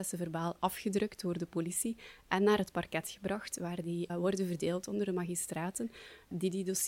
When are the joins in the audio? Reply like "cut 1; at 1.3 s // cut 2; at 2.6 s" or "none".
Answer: cut 1; at 4.1 s

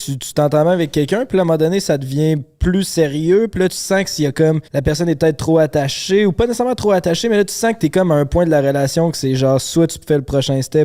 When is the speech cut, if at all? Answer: cut 1; at 4.7 s

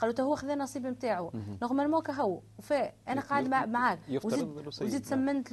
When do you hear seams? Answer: none

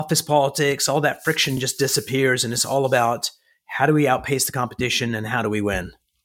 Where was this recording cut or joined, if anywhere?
none

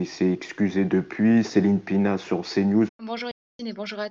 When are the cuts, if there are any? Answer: cut 1; at 2.9 s

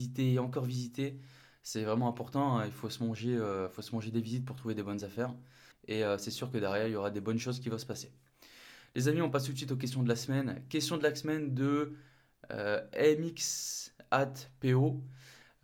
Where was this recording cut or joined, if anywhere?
cut 1; at 5.7 s

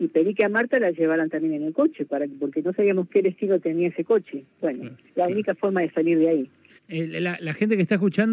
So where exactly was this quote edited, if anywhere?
cut 1; at 6.8 s

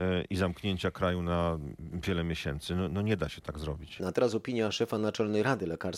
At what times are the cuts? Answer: cut 1; at 4.0 s

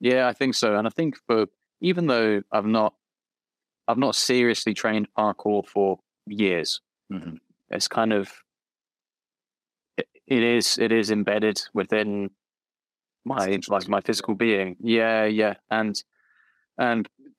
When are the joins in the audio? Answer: cut 1; at 7.6 s

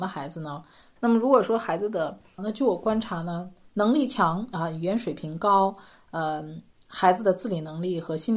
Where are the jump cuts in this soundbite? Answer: cut 1; at 1.0 s // cut 2; at 2.4 s

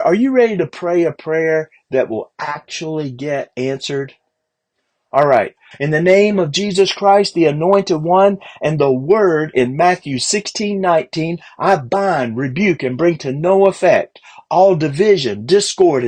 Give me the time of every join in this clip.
cut 1; at 5.7 s

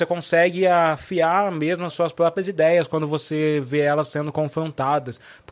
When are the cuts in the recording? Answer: cut 1; at 1.9 s

